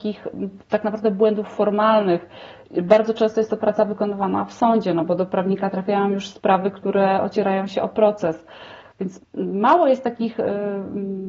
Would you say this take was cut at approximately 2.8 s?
no; 0 cuts

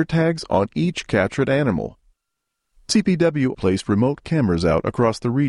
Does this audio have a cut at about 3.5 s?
yes; 1 cut; at 3.5 s

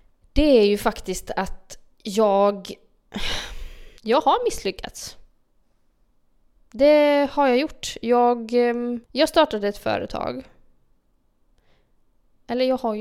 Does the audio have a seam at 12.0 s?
no; 2 cuts; at 4.0 s, 9.0 s

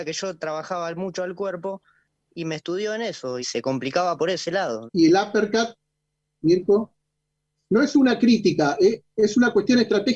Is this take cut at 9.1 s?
no; 3 cuts; at 3.4 s, 4.9 s, 7.6 s

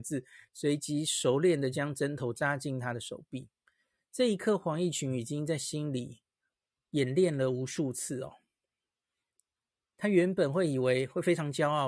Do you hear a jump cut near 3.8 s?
no; 0 cuts

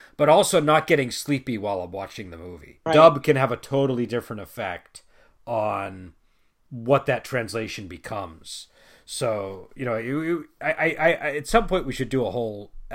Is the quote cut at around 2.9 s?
yes; 1 cut; at 2.9 s

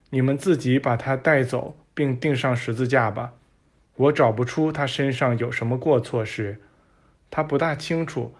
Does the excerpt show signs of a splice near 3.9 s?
no; 0 cuts

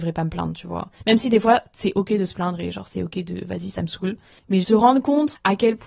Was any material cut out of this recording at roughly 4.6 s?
yes; 1 cut; at 4.6 s

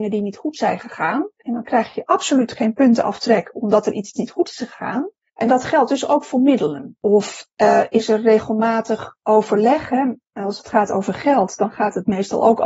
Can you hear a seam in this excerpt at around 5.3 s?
yes; 2 cuts; at 5.3 s, 7.0 s

